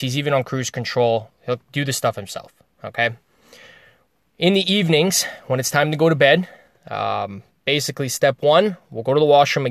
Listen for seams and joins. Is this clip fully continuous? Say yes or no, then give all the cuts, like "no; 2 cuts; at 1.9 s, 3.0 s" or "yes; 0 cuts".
yes; 0 cuts